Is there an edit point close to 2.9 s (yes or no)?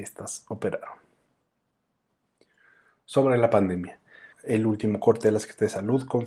no